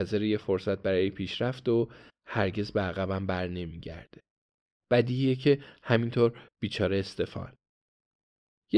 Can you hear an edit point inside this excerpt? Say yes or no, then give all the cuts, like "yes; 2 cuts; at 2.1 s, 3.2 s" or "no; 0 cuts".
yes; 1 cut; at 4.7 s